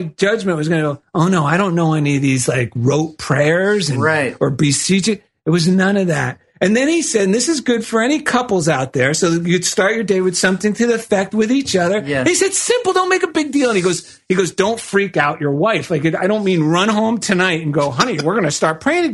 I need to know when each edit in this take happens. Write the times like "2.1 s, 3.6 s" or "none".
none